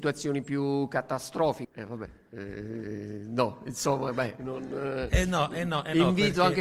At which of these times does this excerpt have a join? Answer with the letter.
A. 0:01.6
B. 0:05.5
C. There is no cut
A